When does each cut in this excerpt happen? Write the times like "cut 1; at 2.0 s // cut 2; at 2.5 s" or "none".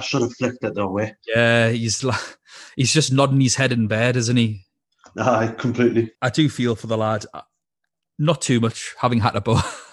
none